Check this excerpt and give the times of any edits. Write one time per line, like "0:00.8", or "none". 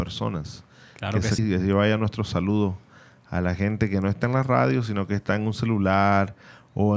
0:01.4